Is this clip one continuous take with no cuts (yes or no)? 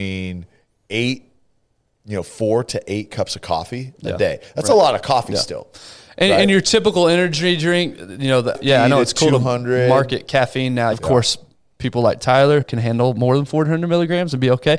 no